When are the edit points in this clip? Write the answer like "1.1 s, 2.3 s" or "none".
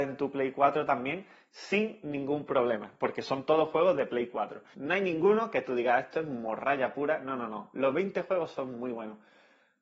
4.7 s